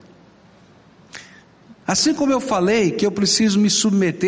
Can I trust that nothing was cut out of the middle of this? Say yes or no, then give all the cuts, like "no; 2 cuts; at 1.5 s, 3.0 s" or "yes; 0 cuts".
no; 1 cut; at 1.8 s